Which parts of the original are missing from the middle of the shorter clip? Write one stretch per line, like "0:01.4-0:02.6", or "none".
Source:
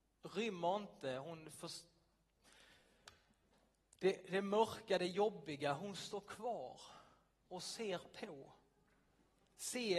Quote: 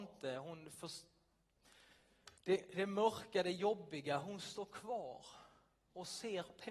0:03.2-0:03.9